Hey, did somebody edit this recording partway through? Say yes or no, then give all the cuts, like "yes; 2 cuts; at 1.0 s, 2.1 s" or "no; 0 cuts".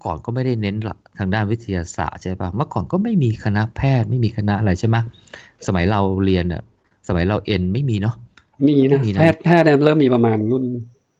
no; 0 cuts